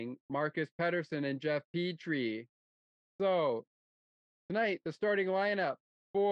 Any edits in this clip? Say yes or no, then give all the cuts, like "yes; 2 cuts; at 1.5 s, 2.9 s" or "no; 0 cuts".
yes; 1 cut; at 3.1 s